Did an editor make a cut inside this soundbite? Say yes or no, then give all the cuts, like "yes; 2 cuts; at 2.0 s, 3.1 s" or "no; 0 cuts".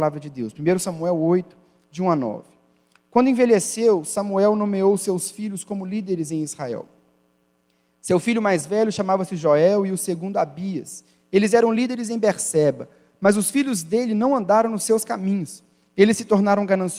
no; 0 cuts